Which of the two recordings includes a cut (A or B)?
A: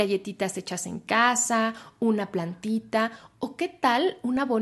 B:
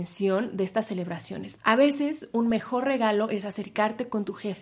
B